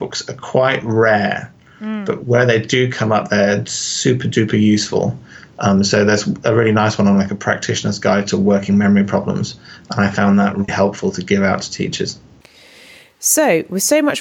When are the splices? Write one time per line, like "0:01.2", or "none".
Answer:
0:10.7